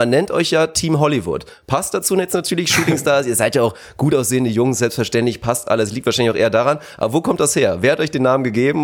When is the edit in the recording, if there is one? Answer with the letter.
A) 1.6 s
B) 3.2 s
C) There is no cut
C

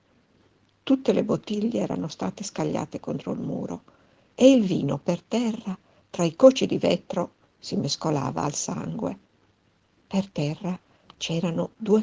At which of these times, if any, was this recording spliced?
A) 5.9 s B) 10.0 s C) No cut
B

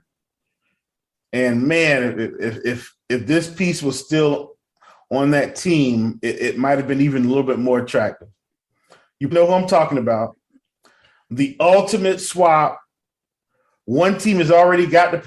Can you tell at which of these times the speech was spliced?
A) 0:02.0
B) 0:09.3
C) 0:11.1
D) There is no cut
B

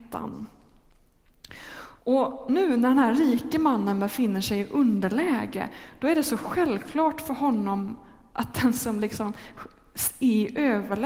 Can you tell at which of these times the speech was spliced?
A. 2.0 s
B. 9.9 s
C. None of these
A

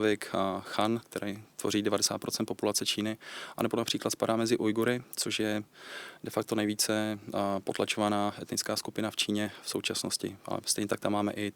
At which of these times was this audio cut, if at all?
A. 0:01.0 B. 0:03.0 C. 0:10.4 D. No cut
A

